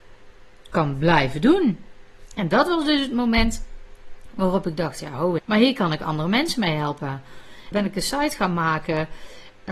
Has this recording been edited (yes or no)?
yes